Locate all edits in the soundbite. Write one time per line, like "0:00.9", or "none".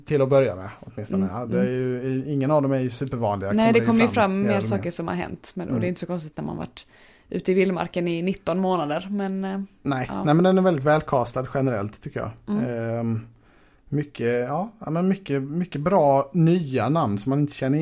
none

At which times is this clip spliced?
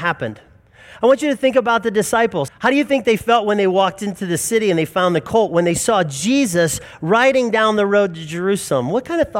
0:02.5
0:05.5

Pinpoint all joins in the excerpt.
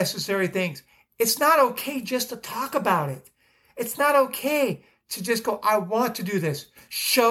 none

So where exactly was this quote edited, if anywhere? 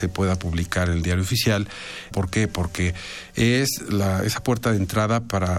0:02.1

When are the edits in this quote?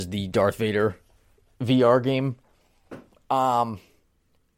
none

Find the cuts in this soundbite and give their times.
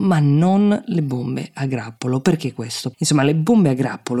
0:02.9

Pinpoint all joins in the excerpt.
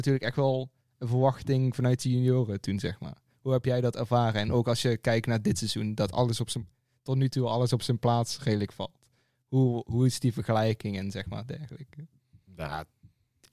none

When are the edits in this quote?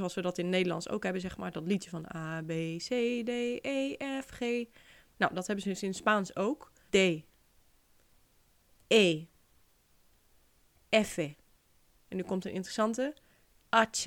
0:06.9
0:11.9

